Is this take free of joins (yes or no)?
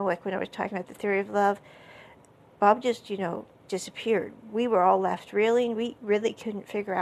no